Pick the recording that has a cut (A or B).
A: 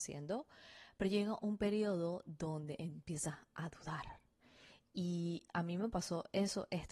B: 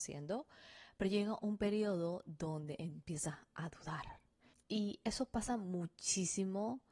B